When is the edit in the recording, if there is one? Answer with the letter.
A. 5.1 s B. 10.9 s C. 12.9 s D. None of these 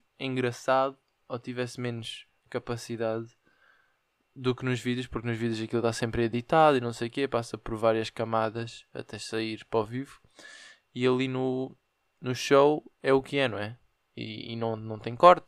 C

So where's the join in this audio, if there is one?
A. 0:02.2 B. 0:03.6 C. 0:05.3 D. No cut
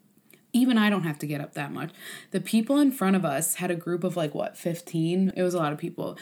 C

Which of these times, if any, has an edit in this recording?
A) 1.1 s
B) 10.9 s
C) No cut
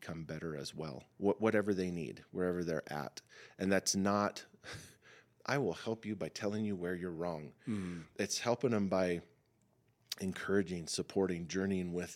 A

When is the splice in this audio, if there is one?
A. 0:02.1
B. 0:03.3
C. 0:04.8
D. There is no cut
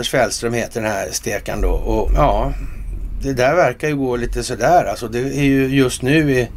A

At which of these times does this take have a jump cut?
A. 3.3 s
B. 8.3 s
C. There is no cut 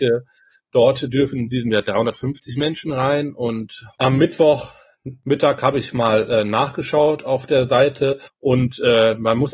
B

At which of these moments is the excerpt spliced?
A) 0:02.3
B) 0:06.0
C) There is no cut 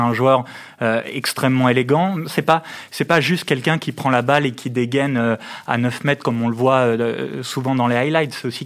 A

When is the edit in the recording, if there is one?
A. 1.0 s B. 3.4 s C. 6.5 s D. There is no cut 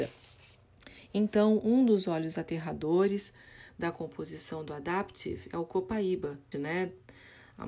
C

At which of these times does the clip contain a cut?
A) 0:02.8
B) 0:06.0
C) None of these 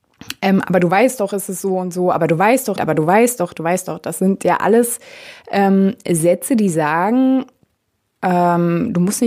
A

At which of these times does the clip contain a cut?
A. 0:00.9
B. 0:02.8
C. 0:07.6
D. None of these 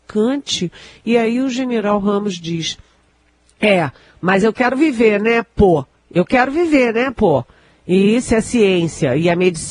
D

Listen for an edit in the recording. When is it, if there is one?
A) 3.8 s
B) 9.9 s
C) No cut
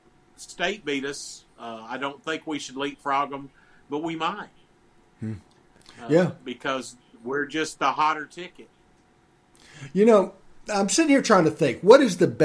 C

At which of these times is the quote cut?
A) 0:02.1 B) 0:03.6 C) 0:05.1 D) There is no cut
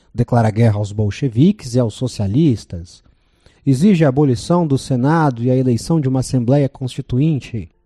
B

